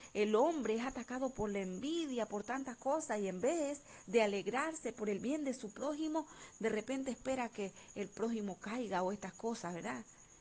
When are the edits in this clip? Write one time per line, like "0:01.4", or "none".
none